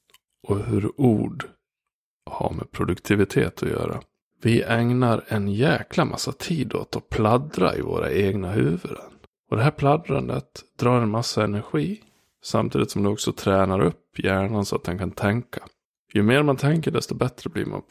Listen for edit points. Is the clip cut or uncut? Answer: uncut